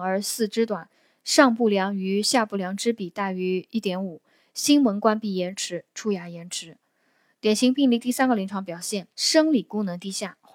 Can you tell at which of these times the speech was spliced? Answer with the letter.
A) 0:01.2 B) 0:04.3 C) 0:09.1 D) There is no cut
C